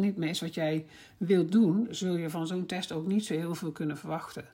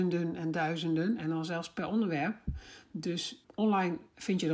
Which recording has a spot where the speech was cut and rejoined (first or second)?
second